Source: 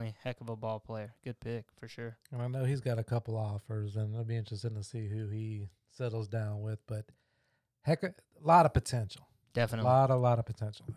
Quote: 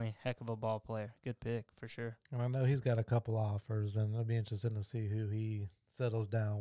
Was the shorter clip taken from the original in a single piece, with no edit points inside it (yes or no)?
yes